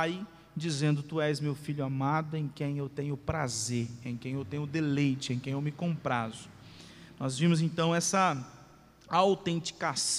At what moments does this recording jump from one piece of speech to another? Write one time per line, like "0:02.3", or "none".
none